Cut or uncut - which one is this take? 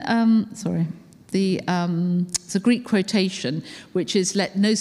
uncut